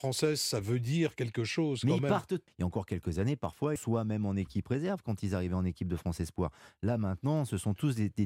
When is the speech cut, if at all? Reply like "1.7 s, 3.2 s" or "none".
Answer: 2.5 s, 3.8 s